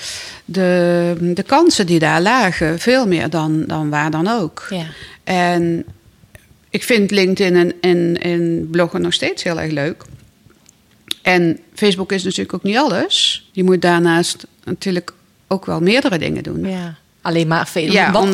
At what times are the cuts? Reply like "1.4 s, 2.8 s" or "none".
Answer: 13.5 s, 16.6 s